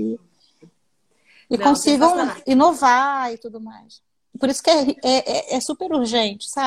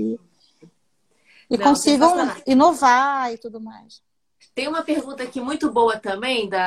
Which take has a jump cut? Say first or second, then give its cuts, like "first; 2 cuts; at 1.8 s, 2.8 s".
first; 1 cut; at 4.3 s